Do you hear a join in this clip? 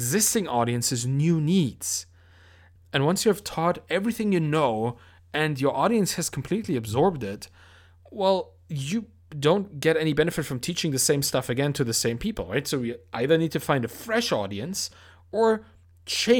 yes; 1 cut; at 2.8 s

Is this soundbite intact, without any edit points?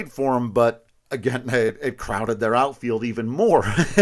yes; 0 cuts

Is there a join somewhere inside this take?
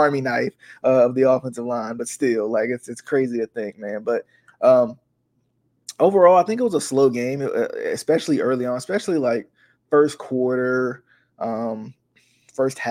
no; 0 cuts

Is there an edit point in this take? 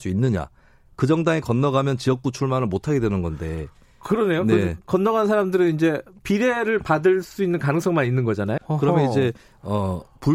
yes; 2 cuts; at 4.8 s, 8.6 s

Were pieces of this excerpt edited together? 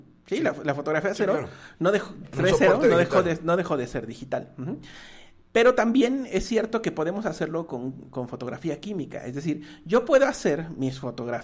no; 0 cuts

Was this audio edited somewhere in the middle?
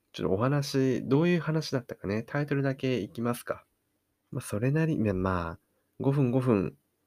yes; 1 cut; at 4.2 s

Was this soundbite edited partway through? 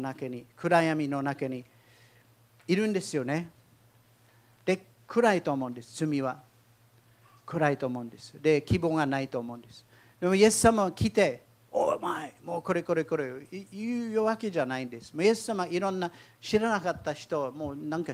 no; 0 cuts

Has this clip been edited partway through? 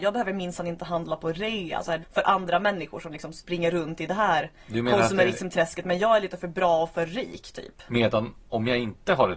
yes; 2 cuts; at 2.0 s, 7.9 s

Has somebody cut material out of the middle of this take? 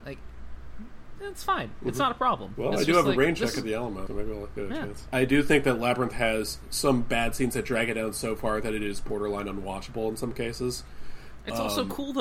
yes; 2 cuts; at 4.1 s, 5.1 s

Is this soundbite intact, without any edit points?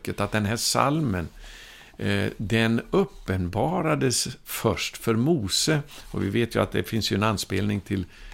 yes; 0 cuts

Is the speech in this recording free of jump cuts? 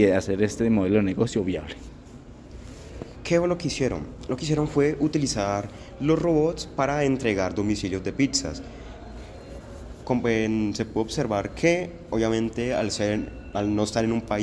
no; 1 cut; at 3.2 s

